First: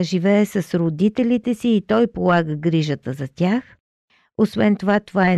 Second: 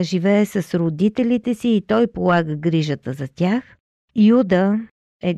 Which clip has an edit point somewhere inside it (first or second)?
second